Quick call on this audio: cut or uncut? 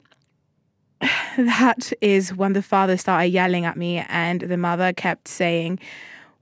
uncut